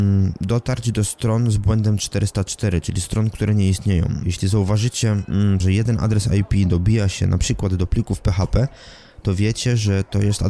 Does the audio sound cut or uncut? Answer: cut